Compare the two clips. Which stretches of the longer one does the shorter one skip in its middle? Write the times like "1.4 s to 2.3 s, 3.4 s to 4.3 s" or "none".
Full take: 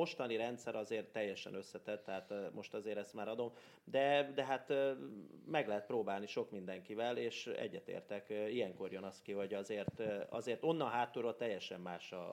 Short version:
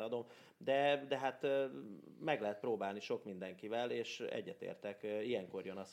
none